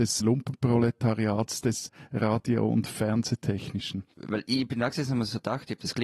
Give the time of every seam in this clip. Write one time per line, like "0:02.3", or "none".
0:04.1